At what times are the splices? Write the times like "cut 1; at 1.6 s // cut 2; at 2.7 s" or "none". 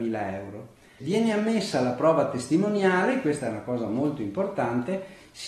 cut 1; at 1.0 s